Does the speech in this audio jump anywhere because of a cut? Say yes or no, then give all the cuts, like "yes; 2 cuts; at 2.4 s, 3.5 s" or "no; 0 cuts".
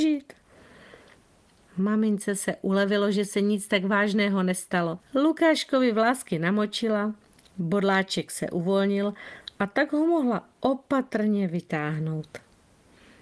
no; 0 cuts